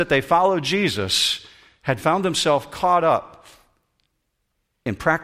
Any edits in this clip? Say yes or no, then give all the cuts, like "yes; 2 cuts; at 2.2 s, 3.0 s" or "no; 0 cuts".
no; 0 cuts